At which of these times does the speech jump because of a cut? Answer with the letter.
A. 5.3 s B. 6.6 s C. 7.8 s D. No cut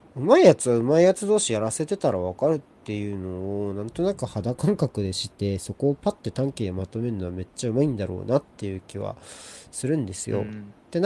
A